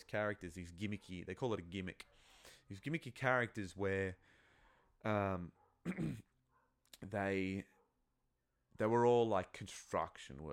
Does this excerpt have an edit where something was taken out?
no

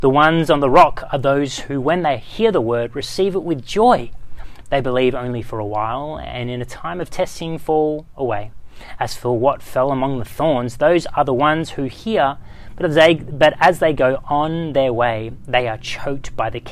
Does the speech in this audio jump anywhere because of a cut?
yes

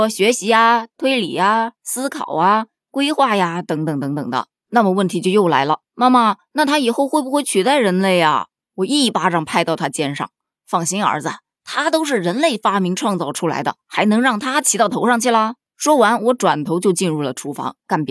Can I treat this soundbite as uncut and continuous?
yes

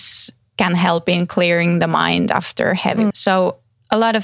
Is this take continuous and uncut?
no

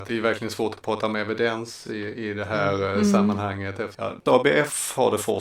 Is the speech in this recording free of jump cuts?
yes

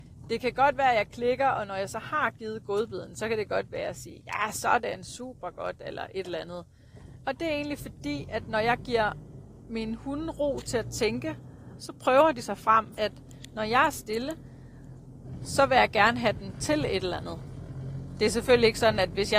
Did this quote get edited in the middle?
yes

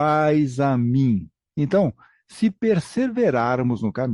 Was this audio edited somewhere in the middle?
yes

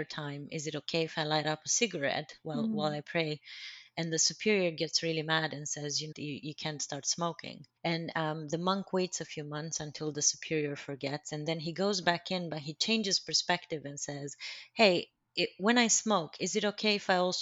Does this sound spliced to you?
yes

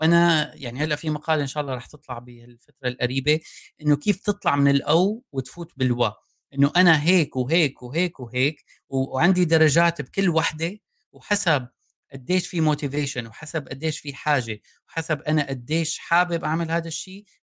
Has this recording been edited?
no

